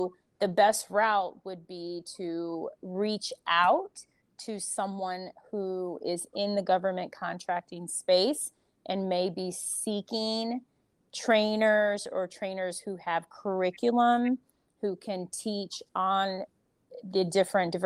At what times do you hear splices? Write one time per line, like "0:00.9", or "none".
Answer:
none